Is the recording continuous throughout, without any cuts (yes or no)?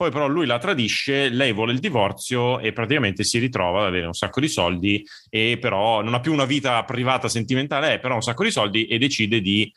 yes